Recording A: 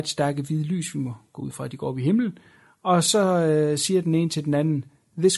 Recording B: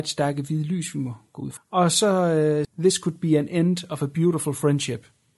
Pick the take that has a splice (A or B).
B